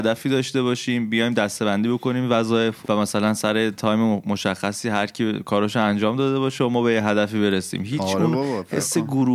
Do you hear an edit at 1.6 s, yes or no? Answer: no